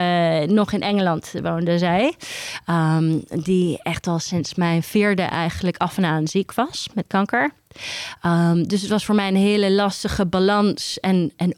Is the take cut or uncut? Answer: uncut